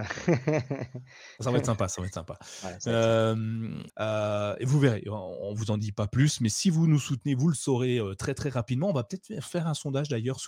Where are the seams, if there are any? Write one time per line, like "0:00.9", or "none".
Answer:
0:03.9